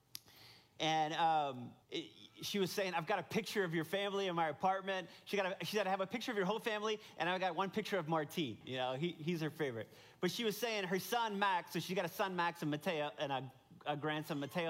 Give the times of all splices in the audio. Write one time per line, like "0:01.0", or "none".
0:01.8
0:08.6